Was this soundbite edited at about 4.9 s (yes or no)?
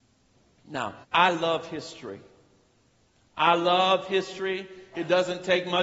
no